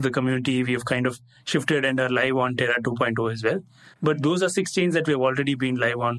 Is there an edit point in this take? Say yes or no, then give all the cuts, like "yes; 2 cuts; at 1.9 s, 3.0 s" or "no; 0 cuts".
no; 0 cuts